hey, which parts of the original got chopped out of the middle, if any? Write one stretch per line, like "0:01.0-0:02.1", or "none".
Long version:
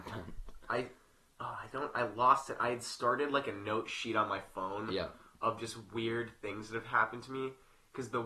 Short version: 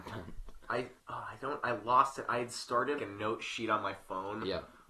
0:01.0-0:01.3
0:03.3-0:03.4